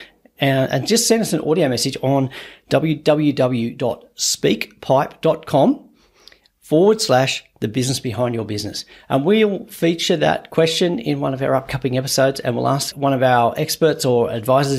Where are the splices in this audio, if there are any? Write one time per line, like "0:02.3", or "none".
none